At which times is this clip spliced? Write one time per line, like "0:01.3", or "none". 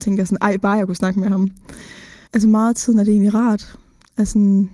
0:02.3